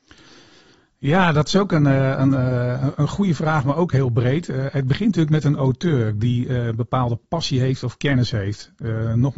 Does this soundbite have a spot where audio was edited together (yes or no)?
no